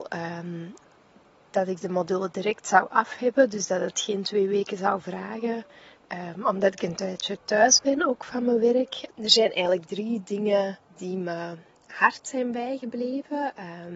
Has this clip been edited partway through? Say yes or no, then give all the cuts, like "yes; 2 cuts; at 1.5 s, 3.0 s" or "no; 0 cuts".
yes; 2 cuts; at 9.1 s, 10.8 s